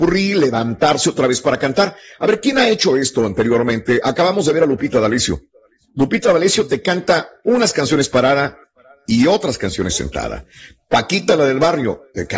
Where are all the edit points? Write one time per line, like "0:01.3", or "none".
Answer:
none